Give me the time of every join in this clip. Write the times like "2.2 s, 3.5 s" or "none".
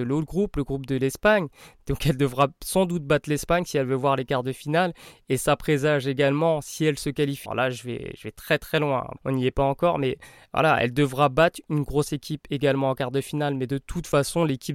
7.5 s, 9.2 s